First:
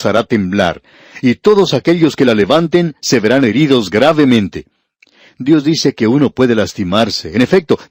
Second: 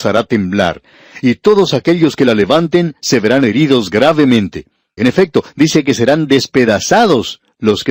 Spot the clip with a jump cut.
second; 1 cut; at 5.0 s

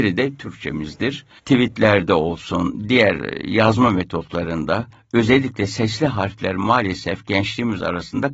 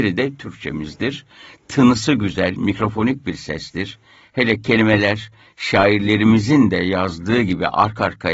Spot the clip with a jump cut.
first; 1 cut; at 1.4 s

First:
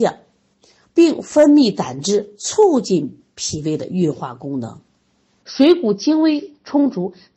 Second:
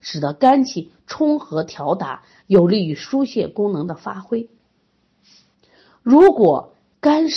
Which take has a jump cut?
first; 1 cut; at 5.4 s

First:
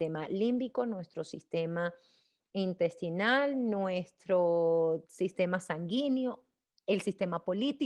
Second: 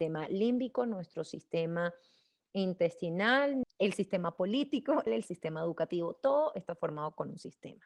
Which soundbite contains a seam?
second; 2 cuts; at 3.6 s, 5.1 s

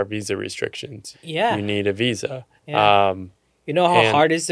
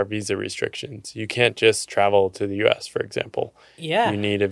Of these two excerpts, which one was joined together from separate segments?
first; 2 cuts; at 1.1 s, 2.6 s

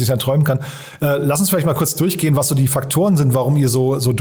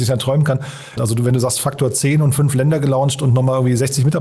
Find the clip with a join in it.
second; 1 cut; at 1.0 s

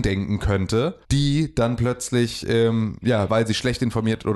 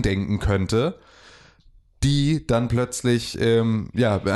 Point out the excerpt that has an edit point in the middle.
first; 2 cuts; at 1.0 s, 3.3 s

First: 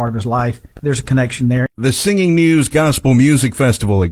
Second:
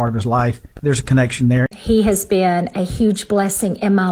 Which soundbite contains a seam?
second; 1 cut; at 1.7 s

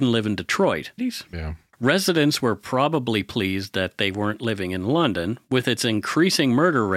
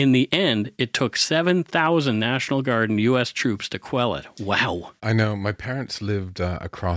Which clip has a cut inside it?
first; 1 cut; at 1.0 s

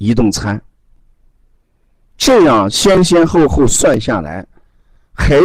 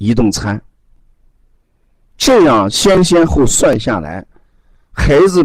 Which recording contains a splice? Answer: second; 1 cut; at 3.3 s

